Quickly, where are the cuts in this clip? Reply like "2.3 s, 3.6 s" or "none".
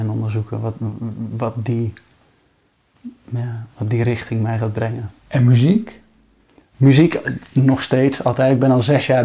none